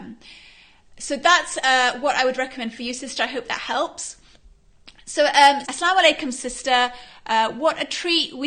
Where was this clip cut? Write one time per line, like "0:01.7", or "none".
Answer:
0:05.6